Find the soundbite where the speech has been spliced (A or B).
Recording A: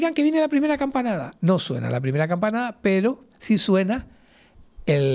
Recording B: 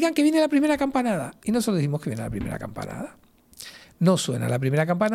A